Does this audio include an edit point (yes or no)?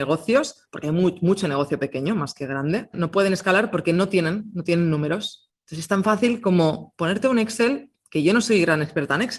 yes